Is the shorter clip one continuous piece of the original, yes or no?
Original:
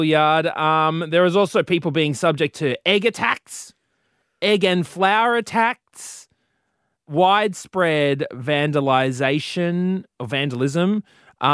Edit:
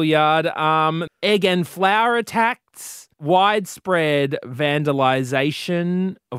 no